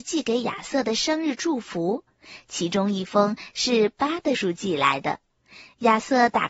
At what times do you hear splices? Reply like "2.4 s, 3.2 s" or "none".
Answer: 4.3 s